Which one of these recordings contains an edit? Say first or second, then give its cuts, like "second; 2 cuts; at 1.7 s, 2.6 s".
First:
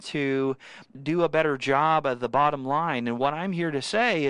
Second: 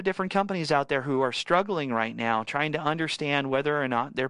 first; 1 cut; at 0.9 s